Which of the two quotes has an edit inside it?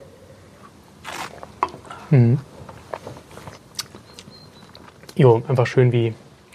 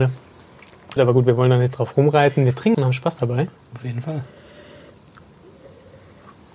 second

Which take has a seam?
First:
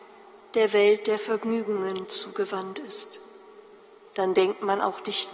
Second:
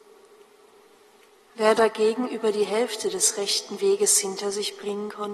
first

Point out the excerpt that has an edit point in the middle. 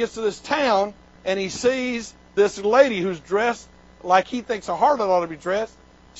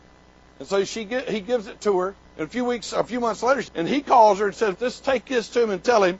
second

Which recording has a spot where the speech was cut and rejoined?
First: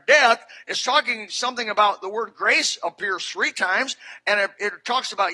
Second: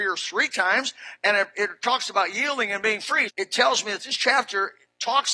second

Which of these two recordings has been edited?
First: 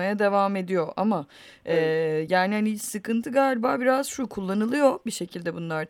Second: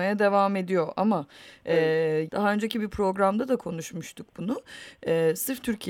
second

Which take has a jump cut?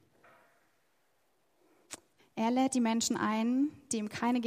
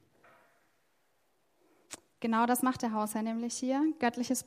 first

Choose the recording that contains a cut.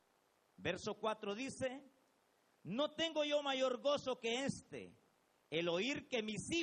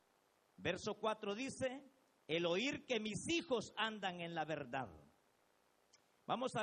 second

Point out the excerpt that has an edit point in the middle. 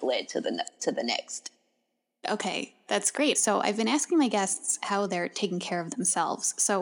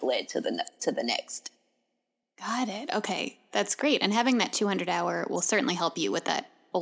first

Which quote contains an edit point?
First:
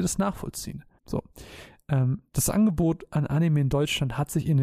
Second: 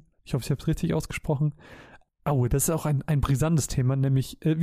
first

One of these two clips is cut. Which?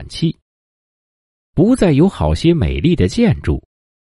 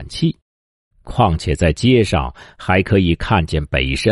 second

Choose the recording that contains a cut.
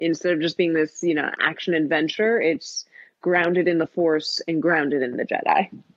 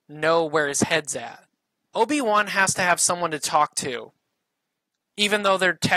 second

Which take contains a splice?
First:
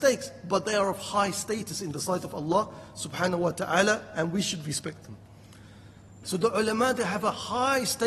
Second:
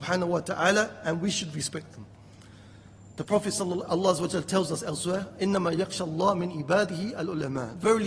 first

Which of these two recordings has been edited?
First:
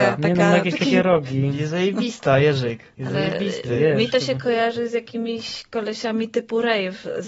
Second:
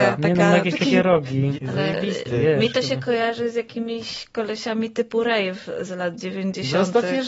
second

